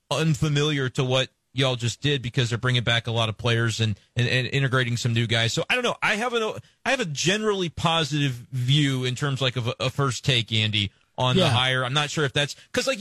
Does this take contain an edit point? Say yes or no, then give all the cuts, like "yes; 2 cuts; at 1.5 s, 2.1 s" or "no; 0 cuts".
no; 0 cuts